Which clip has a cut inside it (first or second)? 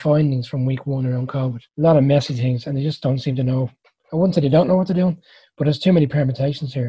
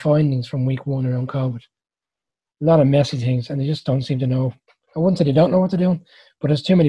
first